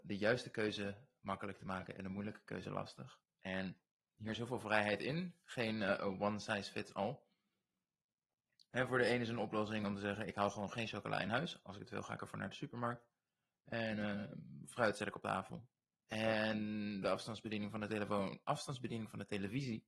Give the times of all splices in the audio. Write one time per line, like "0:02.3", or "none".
0:15.9
0:18.4